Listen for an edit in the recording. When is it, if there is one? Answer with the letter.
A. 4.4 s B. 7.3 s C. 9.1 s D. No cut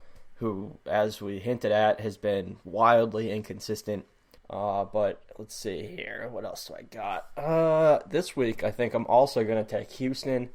A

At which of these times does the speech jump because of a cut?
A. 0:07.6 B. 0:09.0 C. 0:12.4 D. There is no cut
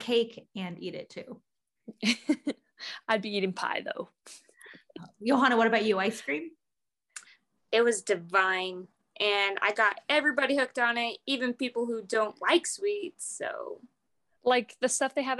A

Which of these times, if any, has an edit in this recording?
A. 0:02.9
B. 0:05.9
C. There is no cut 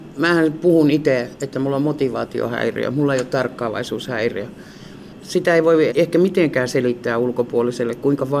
B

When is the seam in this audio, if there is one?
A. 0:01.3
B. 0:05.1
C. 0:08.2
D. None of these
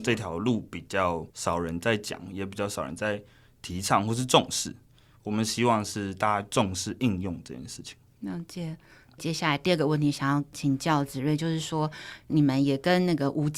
A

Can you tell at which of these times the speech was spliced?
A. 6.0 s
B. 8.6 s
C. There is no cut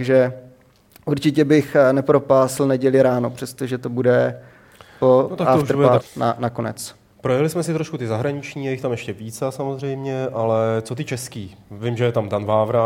A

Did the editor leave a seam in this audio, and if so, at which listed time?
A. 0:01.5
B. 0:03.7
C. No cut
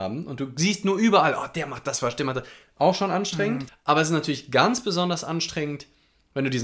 B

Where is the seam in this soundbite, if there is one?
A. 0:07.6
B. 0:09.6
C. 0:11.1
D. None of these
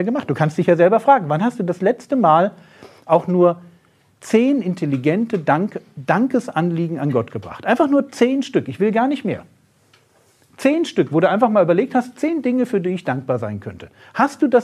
D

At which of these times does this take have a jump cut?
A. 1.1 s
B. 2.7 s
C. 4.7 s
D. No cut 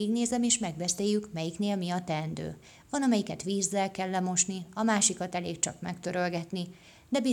D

